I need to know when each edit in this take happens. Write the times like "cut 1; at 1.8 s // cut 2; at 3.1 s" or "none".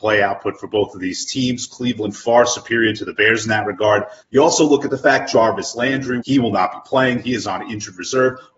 cut 1; at 4.2 s // cut 2; at 6.2 s